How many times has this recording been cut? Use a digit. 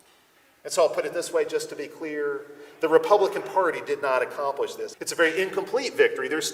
1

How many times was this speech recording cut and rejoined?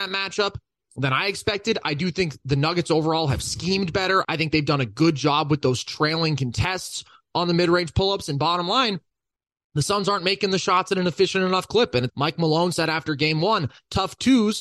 2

